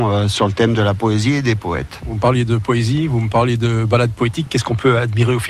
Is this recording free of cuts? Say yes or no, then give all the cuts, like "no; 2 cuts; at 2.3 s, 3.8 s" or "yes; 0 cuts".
yes; 0 cuts